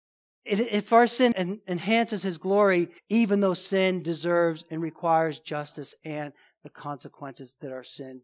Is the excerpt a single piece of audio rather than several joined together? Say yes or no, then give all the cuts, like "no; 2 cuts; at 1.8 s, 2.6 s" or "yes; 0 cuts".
no; 2 cuts; at 1.3 s, 3.0 s